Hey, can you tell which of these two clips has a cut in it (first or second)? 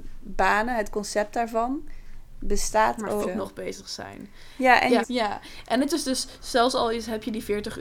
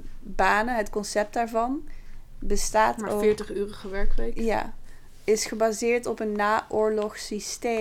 first